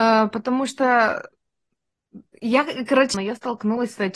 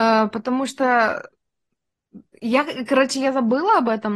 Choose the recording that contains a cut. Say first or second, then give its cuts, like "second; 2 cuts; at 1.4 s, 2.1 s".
first; 1 cut; at 3.1 s